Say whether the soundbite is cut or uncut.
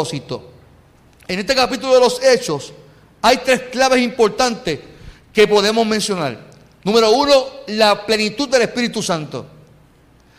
uncut